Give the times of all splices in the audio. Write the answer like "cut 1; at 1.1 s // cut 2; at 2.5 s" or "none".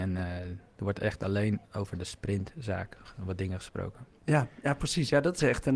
cut 1; at 1.7 s // cut 2; at 4.2 s